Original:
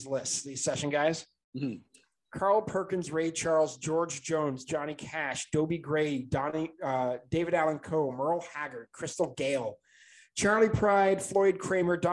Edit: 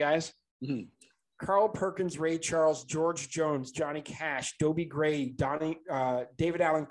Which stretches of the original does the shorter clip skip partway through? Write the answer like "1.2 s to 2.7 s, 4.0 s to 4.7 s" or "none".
none

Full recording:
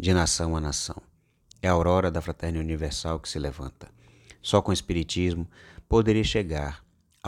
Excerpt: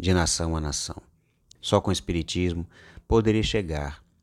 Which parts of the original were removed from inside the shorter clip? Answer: 1.6 s to 4.4 s

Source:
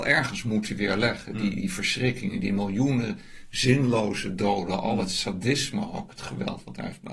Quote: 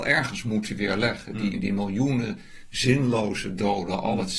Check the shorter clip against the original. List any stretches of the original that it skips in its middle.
1.5 s to 2.3 s

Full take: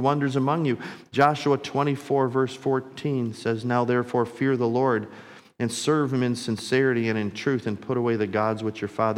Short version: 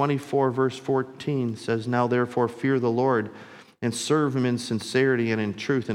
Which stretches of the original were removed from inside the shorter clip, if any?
none

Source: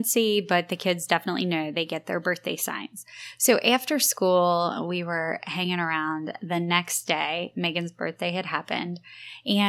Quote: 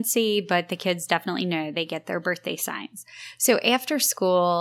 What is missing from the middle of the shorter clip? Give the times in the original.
none

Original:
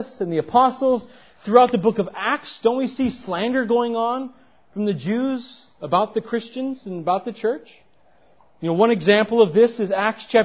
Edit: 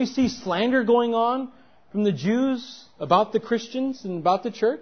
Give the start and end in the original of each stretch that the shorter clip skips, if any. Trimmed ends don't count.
none

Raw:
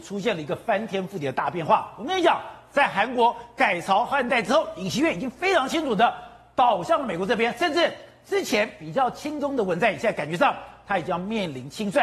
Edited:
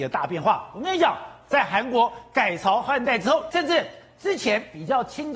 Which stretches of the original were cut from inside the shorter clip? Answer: 4.7 s to 7.6 s

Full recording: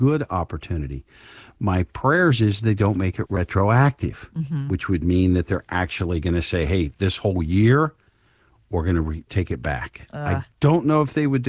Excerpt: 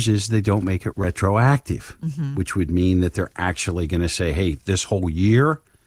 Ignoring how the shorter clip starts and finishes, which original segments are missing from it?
none

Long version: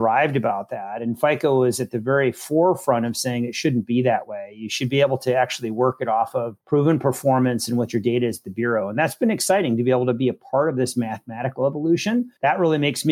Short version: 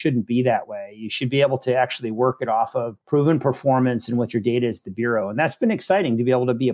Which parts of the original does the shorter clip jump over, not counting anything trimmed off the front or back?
none

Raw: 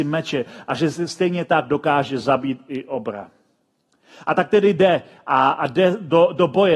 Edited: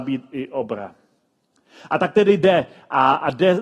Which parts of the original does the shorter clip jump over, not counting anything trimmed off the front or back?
none

